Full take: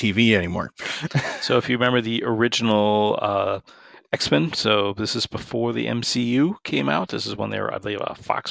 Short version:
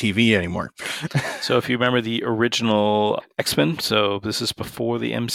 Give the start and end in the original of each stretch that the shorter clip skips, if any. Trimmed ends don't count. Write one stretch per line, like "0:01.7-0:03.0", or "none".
0:03.2-0:03.9